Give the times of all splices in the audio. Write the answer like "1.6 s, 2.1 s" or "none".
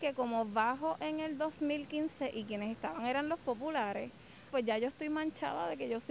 4.5 s